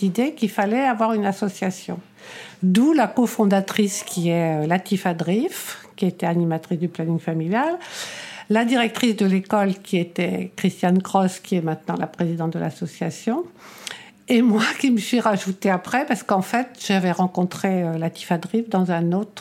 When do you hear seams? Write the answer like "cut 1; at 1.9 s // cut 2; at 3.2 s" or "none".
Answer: none